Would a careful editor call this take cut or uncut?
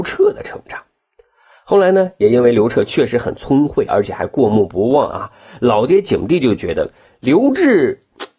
cut